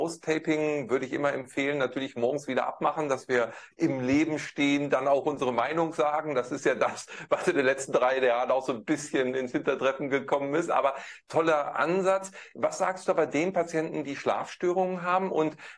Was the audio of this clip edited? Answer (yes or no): no